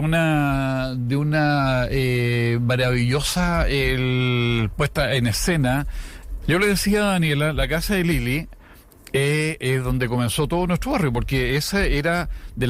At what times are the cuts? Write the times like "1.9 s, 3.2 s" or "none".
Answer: 6.4 s